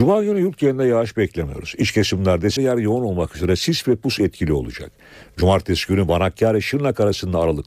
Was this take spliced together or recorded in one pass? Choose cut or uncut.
cut